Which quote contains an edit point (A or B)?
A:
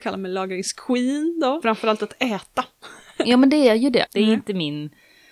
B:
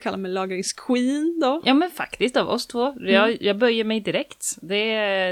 A